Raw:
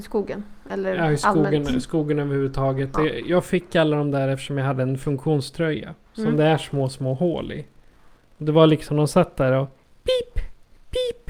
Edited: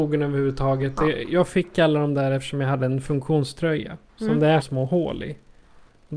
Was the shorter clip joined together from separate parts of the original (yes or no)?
yes